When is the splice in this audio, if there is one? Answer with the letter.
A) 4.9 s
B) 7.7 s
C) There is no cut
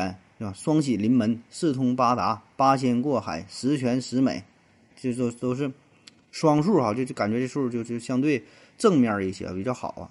A